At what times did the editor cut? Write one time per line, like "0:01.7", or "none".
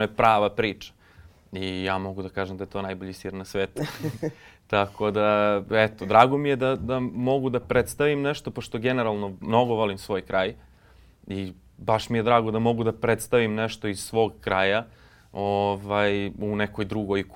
none